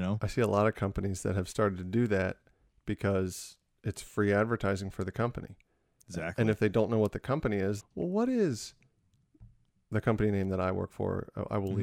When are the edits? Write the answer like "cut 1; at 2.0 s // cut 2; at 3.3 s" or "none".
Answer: cut 1; at 7.8 s